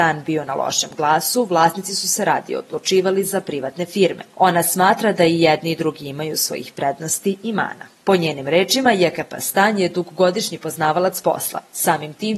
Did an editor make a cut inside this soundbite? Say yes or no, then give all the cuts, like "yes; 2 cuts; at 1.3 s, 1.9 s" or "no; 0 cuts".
no; 0 cuts